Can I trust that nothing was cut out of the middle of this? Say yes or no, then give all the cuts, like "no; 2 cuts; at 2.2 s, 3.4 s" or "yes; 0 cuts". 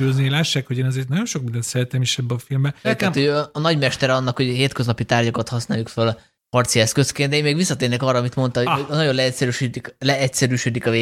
no; 1 cut; at 2.8 s